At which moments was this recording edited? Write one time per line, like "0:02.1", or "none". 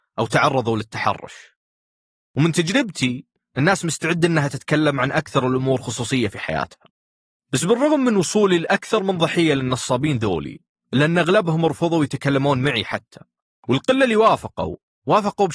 none